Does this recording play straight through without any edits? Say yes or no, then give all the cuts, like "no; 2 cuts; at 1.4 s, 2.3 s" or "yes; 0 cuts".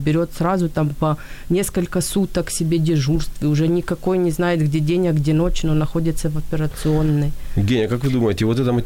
yes; 0 cuts